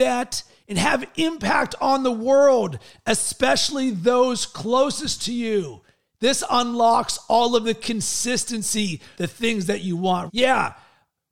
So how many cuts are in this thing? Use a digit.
2